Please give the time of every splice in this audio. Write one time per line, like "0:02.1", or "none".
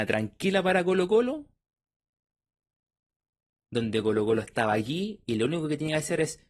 none